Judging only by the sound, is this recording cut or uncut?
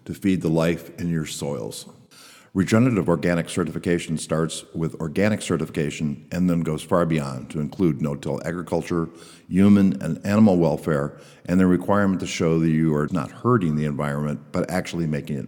cut